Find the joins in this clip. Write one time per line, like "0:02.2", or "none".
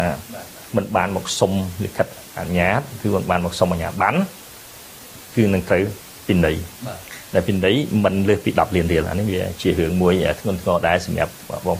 0:02.3

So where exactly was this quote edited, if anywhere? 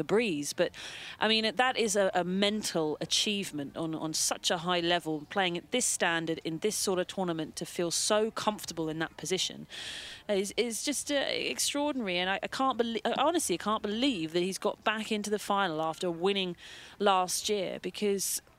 none

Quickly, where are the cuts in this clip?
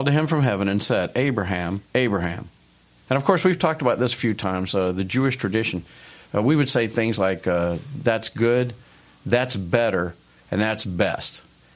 0:01.9

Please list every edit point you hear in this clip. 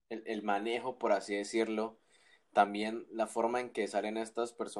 none

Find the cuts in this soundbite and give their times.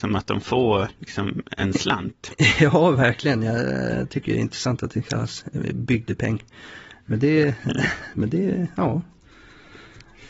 none

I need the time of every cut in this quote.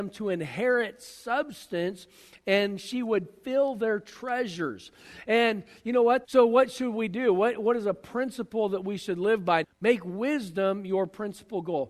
0:06.2
0:09.6

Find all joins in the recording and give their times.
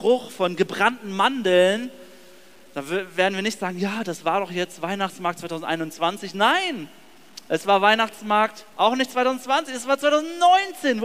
0:08.7

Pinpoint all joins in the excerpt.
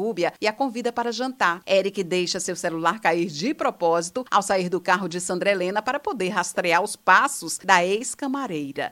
0:01.6

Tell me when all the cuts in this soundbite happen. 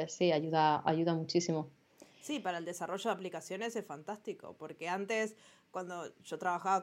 none

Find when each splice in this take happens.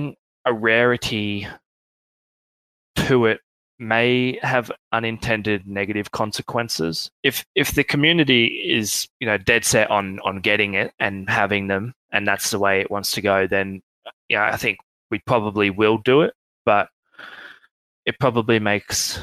0:04.8
0:07.1
0:09.1

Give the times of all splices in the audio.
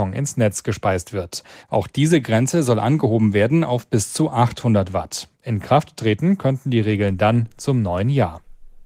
0:01.6
0:05.3

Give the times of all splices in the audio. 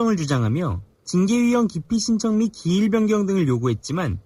0:00.9

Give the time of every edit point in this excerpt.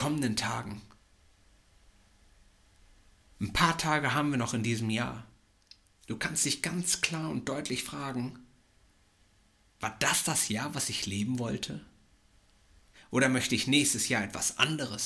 0:12.9

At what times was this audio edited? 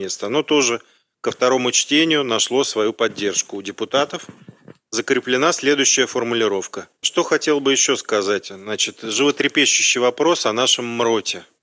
0:07.0

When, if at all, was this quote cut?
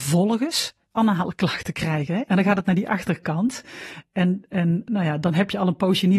0:02.3

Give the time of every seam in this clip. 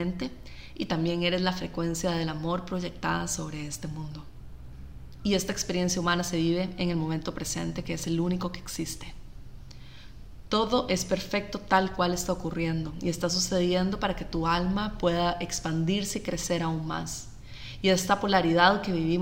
0:05.2

